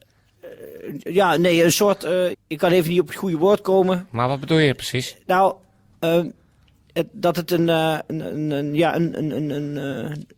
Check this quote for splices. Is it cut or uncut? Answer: cut